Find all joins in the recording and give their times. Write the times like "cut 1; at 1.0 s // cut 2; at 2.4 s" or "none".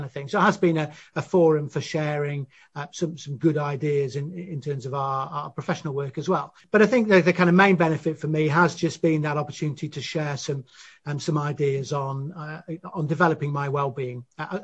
none

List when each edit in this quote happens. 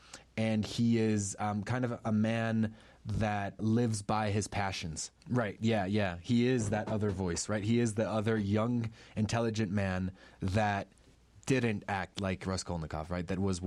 cut 1; at 3.6 s // cut 2; at 5.2 s

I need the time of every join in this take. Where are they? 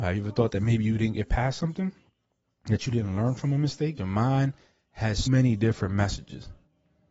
cut 1; at 4.0 s // cut 2; at 5.3 s

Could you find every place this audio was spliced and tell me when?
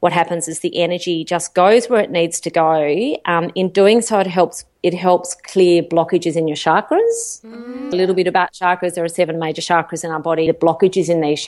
cut 1; at 7.9 s // cut 2; at 10.5 s

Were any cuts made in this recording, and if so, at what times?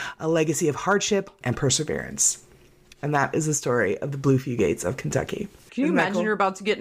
cut 1; at 1.4 s // cut 2; at 5.7 s

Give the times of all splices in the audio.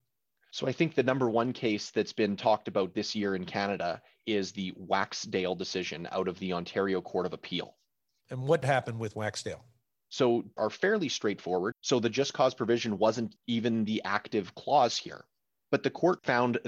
cut 1; at 10.6 s // cut 2; at 11.7 s

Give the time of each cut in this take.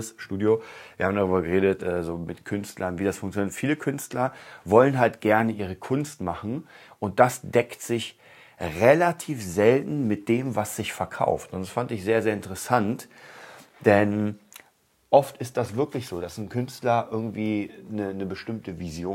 cut 1; at 1.8 s

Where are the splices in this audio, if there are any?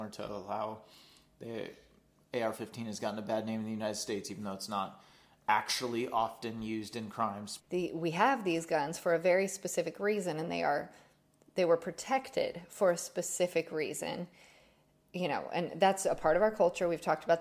cut 1; at 7.6 s

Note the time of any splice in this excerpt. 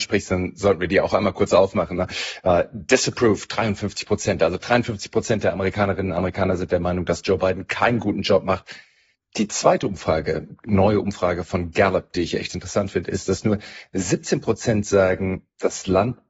cut 1; at 9.1 s

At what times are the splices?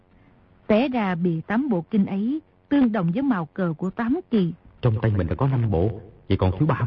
cut 1; at 4.6 s

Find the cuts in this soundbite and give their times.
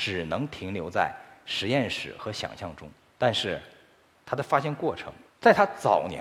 cut 1; at 5.3 s

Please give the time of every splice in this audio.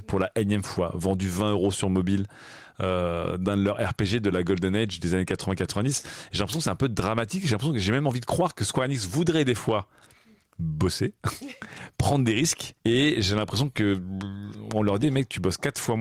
cut 1; at 12.8 s // cut 2; at 15.0 s

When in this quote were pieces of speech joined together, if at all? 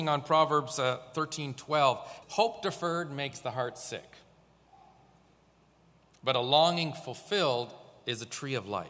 cut 1; at 2.2 s

